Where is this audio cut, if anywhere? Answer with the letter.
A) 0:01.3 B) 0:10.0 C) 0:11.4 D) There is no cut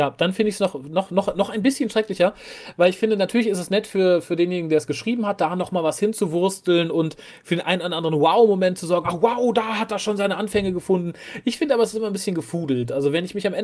D